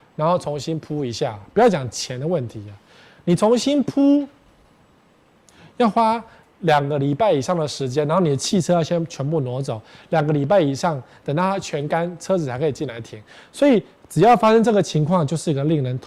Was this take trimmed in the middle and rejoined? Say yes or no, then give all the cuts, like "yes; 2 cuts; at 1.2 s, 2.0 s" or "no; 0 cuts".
no; 0 cuts